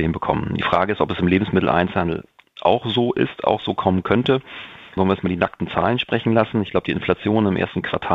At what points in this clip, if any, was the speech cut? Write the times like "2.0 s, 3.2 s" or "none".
none